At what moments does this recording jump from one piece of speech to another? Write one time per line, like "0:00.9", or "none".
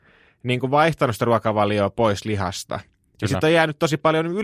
none